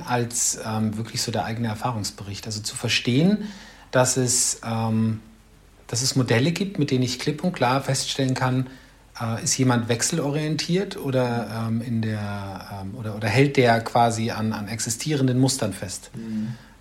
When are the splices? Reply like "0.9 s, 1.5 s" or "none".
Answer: none